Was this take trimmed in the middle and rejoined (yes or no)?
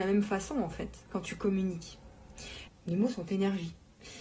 yes